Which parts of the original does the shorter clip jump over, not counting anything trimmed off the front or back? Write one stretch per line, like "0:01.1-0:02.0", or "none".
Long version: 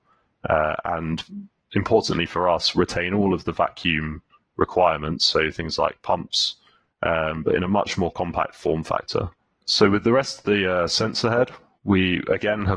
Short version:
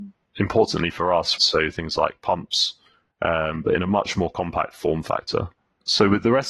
0:02.7-0:05.2